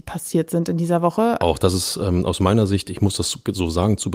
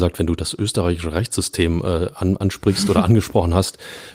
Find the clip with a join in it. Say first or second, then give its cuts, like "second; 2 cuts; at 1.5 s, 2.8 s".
first; 1 cut; at 1.4 s